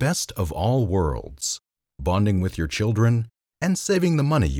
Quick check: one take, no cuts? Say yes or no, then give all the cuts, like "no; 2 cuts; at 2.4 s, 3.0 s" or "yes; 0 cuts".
no; 1 cut; at 3.5 s